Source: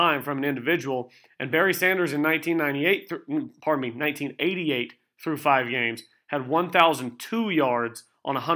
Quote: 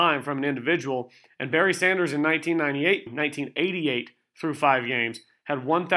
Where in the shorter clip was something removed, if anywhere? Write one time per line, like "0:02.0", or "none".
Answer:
0:03.1

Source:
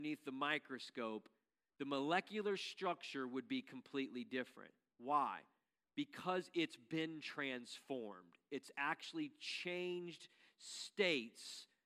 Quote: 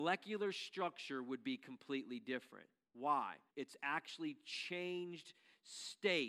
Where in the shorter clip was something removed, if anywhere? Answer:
0:03.5

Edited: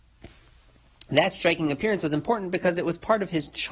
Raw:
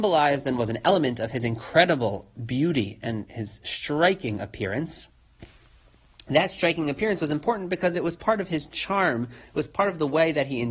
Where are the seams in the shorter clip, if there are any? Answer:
none

